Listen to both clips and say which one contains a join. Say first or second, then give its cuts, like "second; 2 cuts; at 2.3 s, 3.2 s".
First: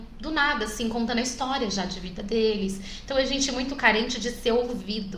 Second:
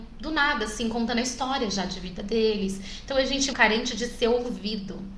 second; 1 cut; at 3.5 s